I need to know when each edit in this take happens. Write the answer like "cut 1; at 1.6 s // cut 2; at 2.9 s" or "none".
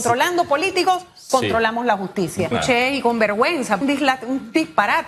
cut 1; at 2.5 s // cut 2; at 3.8 s